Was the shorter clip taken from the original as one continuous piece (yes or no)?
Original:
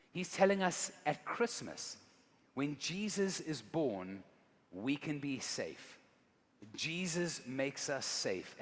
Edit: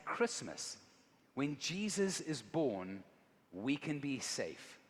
yes